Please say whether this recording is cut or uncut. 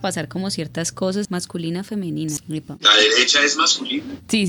cut